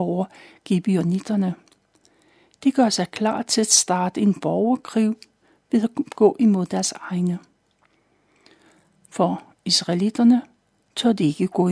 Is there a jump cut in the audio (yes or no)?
no